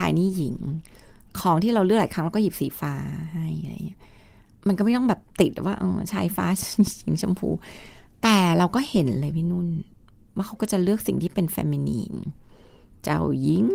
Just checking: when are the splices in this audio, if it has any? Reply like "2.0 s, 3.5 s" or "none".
none

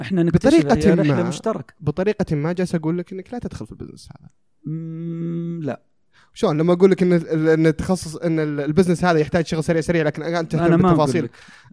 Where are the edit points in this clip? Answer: none

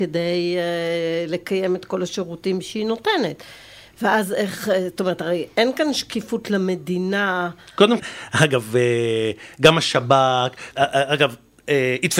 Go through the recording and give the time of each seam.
8.0 s, 10.7 s

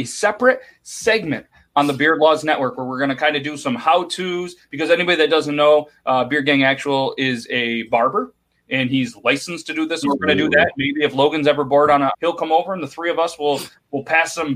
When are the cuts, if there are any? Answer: 10.0 s, 12.1 s

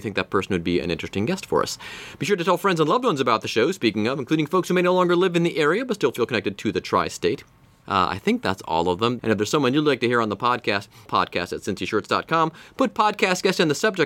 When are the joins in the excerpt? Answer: 7.8 s, 9.2 s, 11.1 s

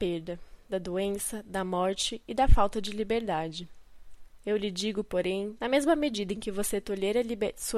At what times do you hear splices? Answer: 4.4 s, 5.6 s

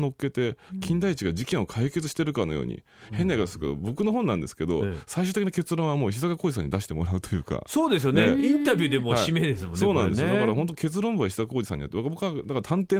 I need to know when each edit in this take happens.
none

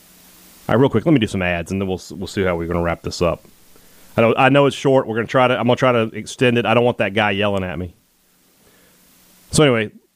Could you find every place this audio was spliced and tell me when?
none

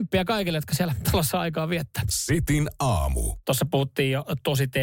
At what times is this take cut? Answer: none

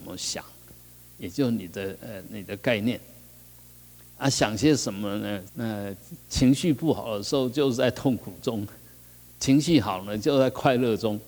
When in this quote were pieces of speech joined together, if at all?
5.5 s

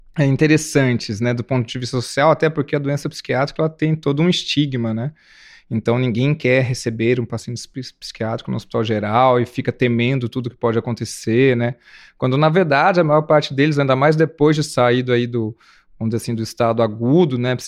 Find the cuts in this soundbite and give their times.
none

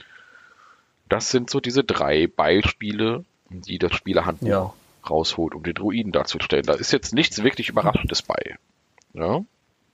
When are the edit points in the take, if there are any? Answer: none

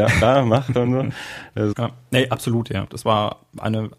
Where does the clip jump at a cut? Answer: 1.7 s, 2.9 s

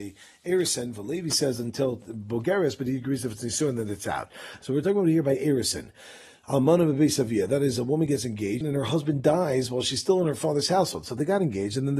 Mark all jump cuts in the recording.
8.6 s

